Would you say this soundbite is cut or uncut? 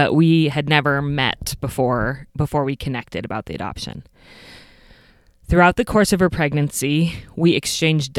cut